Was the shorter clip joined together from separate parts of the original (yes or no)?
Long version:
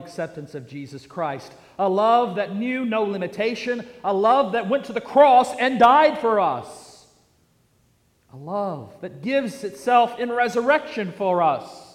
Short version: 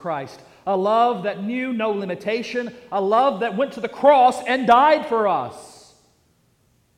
no